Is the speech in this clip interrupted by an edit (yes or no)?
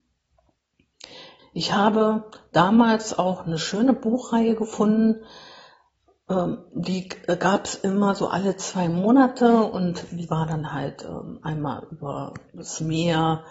yes